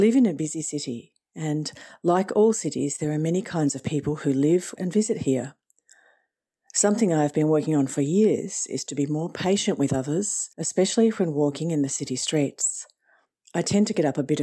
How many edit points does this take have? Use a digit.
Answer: 2